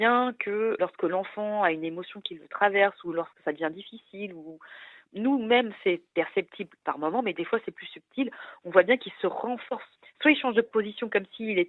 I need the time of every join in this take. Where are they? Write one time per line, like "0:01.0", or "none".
none